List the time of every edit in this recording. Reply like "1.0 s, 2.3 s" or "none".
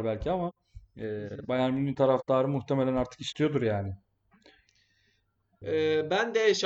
5.6 s